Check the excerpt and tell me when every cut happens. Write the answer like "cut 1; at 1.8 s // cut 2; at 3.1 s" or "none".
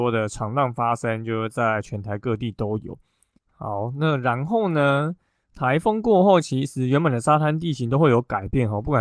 cut 1; at 3.4 s